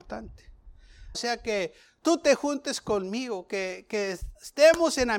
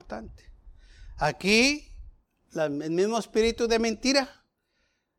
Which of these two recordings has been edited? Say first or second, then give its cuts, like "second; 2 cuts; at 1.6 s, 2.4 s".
first; 1 cut; at 1.1 s